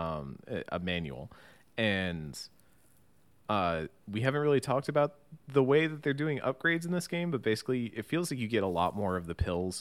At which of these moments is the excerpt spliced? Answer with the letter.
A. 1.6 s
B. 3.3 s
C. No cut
C